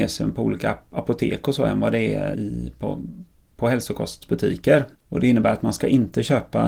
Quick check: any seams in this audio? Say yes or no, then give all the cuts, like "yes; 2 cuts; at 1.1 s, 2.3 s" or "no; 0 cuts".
yes; 2 cuts; at 2.3 s, 4.9 s